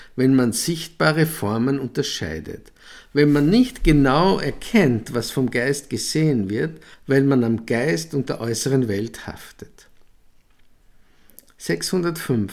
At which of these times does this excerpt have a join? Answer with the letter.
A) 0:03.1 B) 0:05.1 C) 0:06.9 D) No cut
C